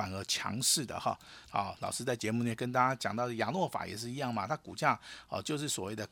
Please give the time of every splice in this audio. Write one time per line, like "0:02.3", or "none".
0:01.4